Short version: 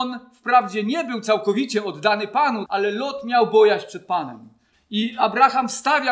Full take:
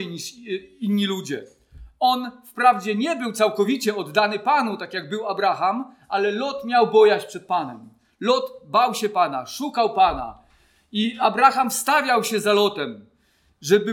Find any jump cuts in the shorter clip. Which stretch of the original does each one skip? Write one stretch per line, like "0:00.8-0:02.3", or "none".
0:04.8-0:06.1
0:08.1-0:10.7